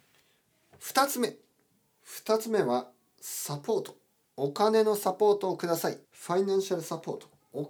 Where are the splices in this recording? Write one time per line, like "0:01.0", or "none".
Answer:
0:06.0